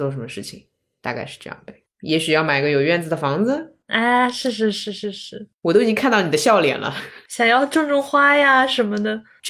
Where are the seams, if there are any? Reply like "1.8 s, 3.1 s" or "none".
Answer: none